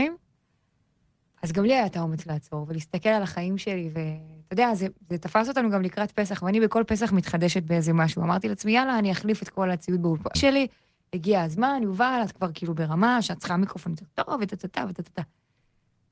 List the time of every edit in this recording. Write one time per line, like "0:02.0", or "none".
0:10.3